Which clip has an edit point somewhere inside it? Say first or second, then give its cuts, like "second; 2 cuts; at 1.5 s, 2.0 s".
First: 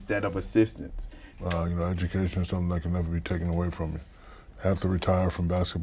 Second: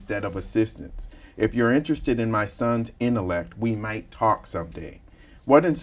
first; 1 cut; at 1.3 s